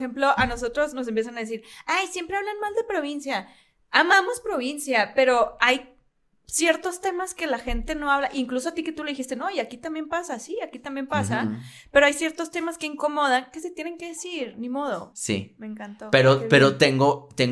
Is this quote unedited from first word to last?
no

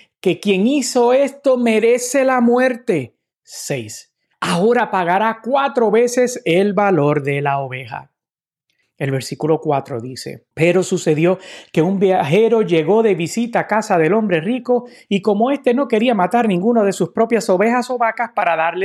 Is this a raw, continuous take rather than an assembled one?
no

